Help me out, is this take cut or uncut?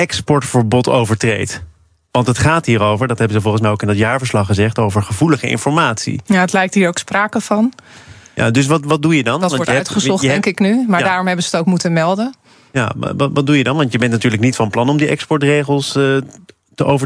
uncut